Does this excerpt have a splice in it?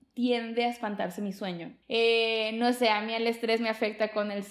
yes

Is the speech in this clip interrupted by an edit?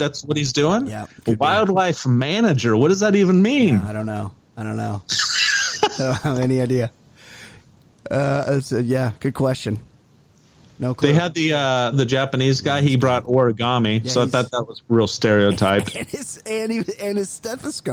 yes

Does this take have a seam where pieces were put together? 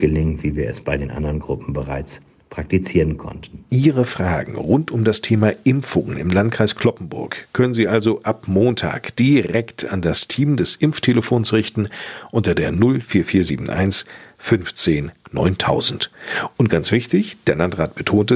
no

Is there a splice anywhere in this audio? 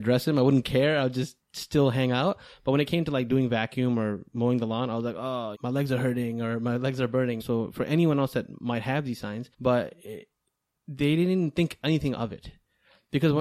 yes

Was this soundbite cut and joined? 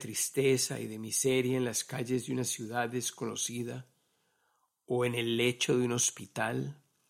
no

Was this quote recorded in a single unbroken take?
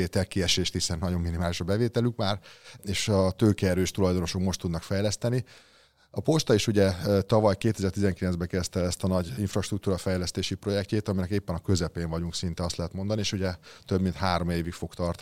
yes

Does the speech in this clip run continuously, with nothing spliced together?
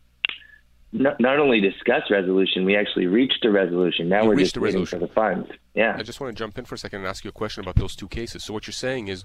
no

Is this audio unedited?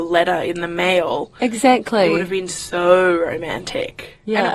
yes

